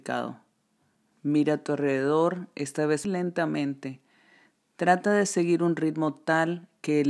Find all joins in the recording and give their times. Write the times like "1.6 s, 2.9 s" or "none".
1.1 s, 3.0 s